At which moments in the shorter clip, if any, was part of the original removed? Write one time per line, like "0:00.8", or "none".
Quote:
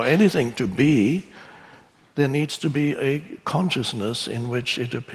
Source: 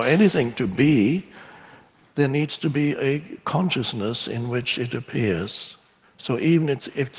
none